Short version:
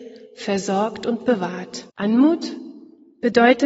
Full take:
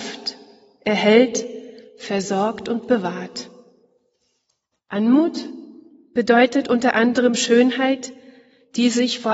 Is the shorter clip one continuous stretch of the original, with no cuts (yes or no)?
no